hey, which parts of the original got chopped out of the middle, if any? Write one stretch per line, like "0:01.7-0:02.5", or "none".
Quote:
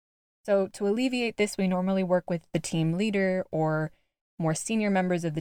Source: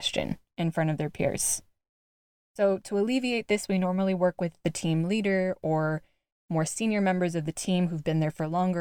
none